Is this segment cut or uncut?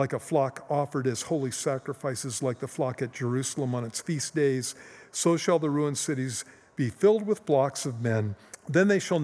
uncut